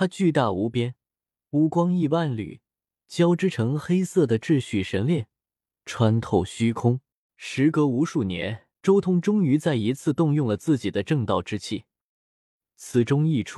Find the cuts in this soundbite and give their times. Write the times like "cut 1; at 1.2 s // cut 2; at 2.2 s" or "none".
cut 1; at 1.5 s // cut 2; at 7.3 s // cut 3; at 8.8 s